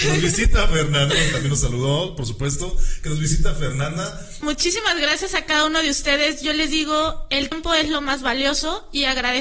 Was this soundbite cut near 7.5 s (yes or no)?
yes